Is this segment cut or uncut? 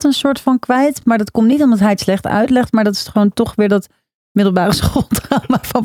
uncut